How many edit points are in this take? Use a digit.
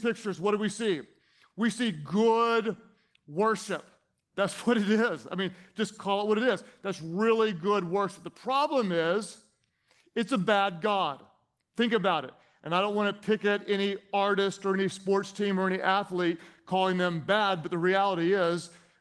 0